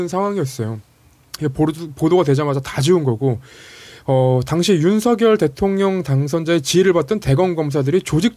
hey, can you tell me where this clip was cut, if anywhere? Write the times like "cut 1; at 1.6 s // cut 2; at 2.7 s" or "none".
none